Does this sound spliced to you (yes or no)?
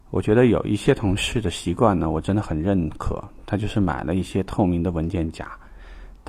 no